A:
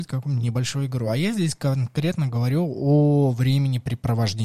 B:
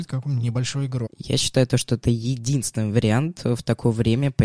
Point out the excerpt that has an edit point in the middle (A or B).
B